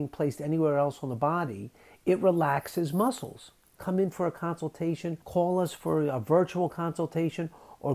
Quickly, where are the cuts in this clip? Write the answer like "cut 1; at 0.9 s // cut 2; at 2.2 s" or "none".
cut 1; at 3.8 s // cut 2; at 5.2 s